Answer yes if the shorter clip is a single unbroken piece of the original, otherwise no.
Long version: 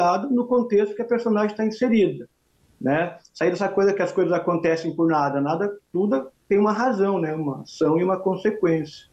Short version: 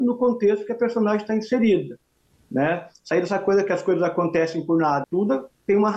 no